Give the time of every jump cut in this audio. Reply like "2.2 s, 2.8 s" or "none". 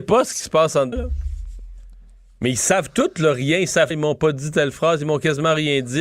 0.9 s, 3.9 s